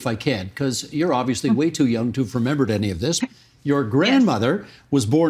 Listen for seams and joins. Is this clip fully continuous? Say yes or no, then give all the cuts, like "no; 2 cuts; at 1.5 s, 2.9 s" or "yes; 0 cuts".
no; 1 cut; at 3.2 s